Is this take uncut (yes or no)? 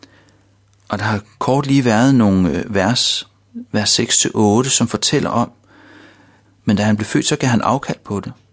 no